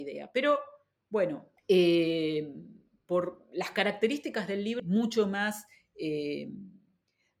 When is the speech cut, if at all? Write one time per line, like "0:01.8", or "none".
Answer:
0:01.6
0:04.8